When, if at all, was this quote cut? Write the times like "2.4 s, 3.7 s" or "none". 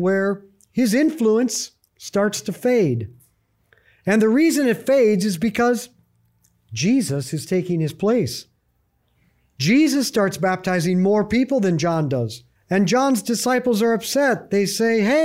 12.6 s

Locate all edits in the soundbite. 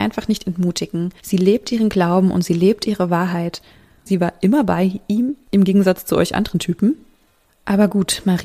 1.2 s, 4.1 s

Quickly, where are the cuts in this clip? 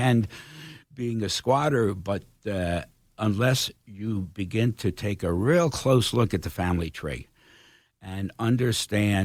none

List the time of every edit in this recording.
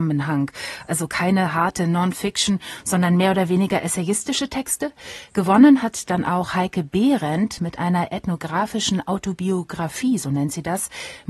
none

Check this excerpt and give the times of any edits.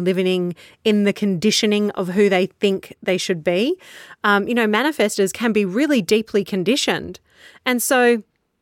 none

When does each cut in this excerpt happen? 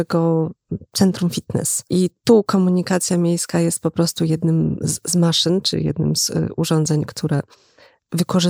1.9 s

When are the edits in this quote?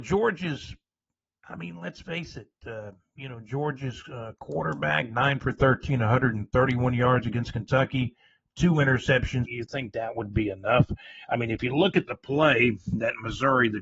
9.5 s

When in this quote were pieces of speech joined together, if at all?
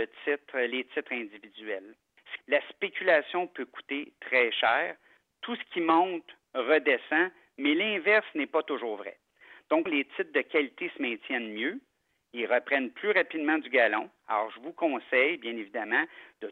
2.4 s, 9.9 s

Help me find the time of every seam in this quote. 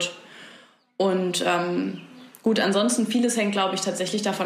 none

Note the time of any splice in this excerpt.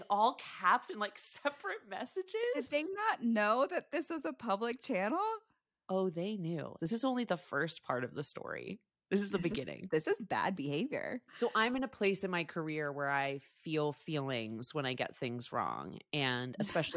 6.8 s

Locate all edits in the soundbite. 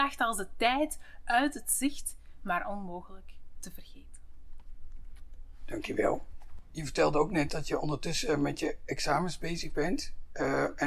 none

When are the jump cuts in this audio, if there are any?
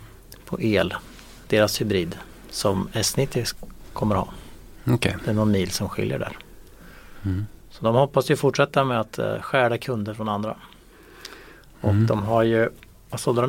none

